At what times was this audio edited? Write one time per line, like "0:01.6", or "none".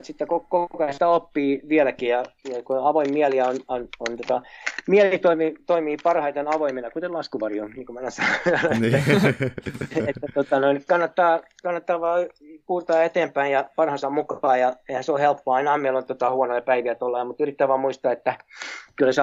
none